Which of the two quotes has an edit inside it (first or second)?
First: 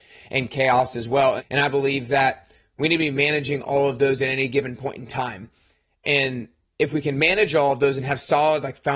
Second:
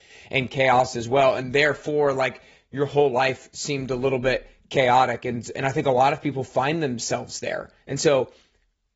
first